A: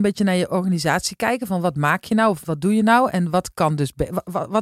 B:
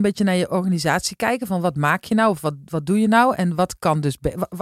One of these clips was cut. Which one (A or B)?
A